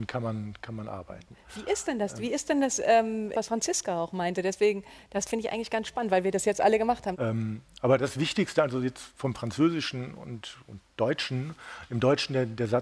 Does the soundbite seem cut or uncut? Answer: cut